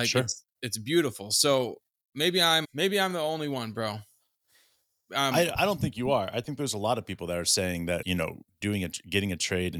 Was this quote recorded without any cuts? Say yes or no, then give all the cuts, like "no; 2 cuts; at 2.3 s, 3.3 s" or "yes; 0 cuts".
no; 3 cuts; at 2.6 s, 5.6 s, 8.0 s